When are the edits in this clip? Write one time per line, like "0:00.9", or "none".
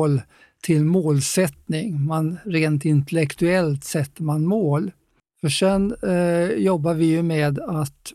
0:05.2